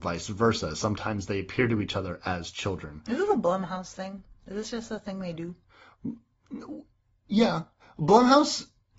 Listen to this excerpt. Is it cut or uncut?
uncut